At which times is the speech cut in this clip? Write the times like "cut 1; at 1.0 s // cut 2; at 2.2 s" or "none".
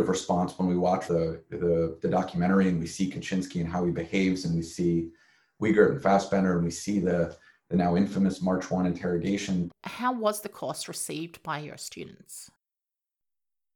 cut 1; at 1.1 s // cut 2; at 9.7 s

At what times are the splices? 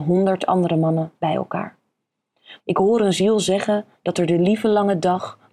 cut 1; at 2.6 s

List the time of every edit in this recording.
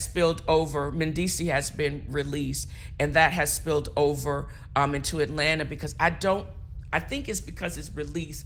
none

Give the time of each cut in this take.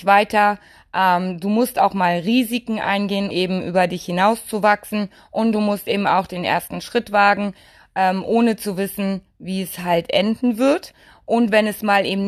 cut 1; at 3.3 s

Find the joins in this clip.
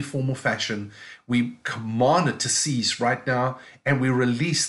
none

